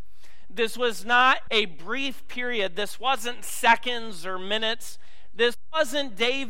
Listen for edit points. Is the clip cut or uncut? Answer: cut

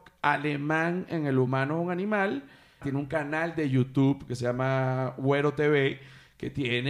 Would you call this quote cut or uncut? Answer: cut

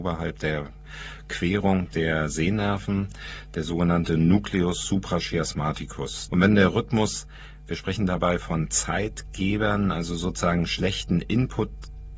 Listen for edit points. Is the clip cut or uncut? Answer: cut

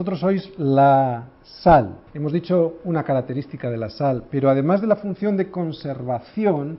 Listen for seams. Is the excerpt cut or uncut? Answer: cut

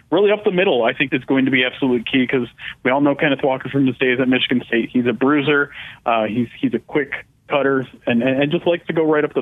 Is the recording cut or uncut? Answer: cut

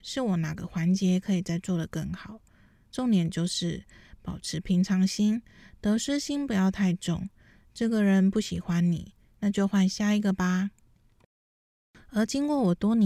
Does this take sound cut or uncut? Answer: uncut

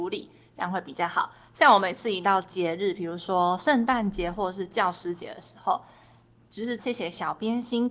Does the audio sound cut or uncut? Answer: cut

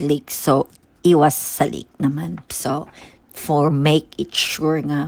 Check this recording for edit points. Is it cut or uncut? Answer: cut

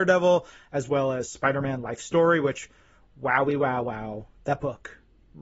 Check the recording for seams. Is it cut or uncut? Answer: uncut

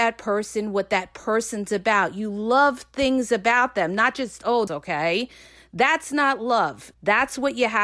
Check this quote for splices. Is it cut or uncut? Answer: cut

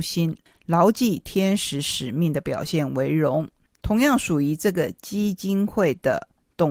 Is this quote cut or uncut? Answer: uncut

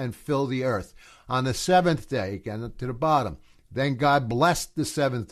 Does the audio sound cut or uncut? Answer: uncut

